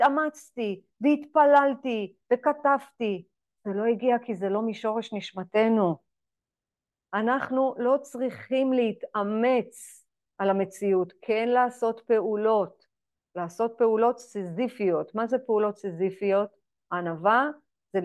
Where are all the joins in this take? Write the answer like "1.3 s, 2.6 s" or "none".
7.1 s